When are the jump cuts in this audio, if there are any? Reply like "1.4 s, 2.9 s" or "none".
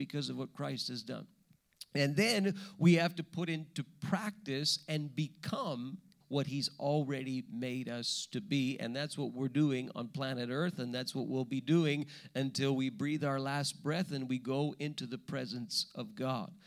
6.2 s